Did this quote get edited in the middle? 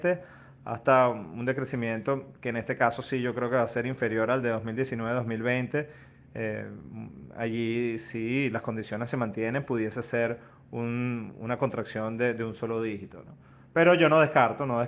no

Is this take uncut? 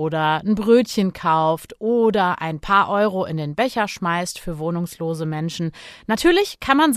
yes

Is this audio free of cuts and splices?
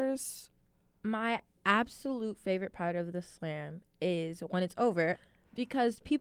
no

